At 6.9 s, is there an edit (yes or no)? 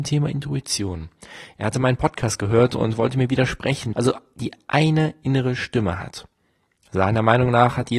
no